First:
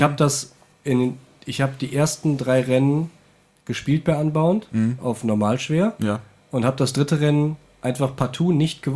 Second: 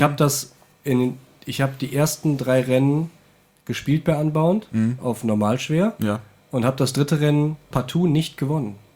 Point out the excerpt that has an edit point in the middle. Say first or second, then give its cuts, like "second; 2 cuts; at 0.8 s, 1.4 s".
second; 1 cut; at 7.7 s